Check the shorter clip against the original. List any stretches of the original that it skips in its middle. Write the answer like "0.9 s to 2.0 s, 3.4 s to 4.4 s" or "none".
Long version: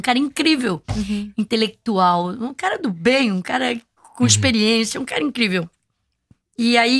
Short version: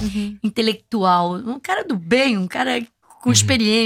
none